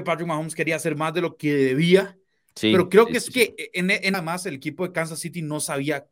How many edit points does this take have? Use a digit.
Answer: 1